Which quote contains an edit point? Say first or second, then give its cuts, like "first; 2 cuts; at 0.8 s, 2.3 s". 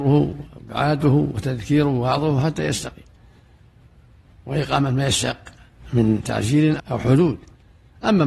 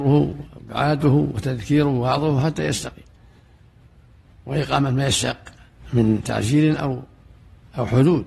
first; 1 cut; at 6.8 s